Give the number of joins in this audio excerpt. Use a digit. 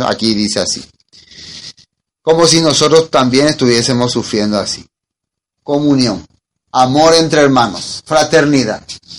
1